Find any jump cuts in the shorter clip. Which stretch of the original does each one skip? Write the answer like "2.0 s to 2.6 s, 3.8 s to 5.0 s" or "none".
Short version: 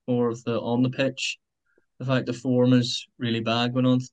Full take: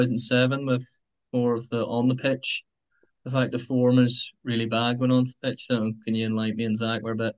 none